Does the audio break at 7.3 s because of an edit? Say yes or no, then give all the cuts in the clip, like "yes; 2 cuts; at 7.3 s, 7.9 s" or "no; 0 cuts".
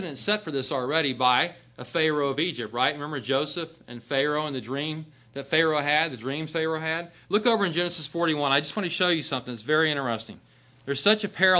no; 0 cuts